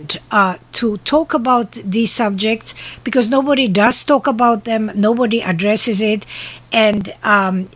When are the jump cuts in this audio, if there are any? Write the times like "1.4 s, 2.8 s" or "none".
none